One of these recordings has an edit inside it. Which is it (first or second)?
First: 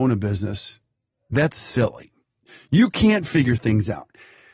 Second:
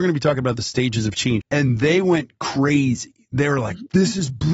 second